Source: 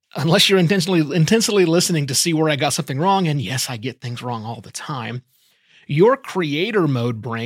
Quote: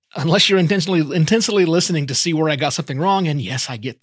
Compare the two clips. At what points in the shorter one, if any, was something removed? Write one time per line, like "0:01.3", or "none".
none